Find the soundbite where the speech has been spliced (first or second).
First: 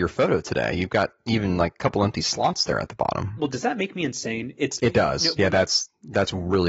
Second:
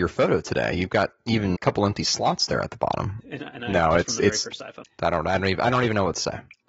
second